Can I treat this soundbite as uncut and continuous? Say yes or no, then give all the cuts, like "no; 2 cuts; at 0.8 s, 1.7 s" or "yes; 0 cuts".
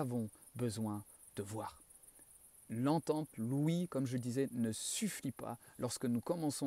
yes; 0 cuts